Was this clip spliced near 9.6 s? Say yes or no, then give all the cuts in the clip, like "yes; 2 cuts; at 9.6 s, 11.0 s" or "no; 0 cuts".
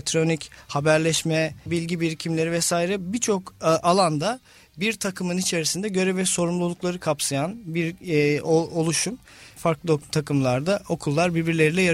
yes; 2 cuts; at 1.7 s, 9.6 s